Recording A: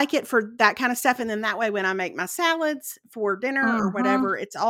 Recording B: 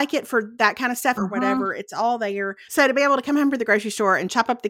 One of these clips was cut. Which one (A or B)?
B